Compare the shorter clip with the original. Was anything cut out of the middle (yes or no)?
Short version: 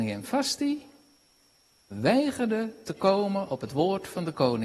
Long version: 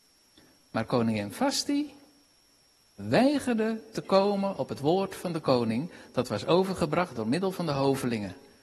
no